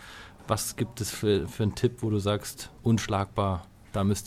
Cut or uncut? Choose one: cut